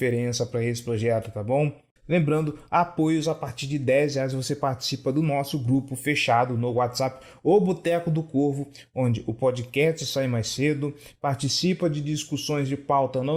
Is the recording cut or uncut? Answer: cut